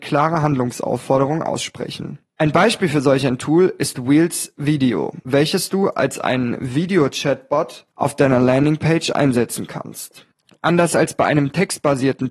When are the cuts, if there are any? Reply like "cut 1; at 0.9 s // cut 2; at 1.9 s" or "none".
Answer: none